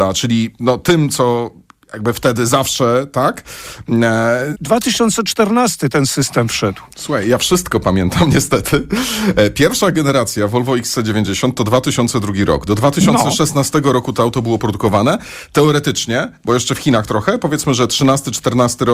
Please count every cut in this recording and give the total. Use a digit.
1